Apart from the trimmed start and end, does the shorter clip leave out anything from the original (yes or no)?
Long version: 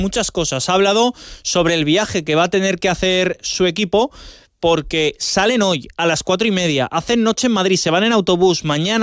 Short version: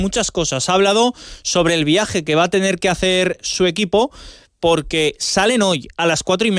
no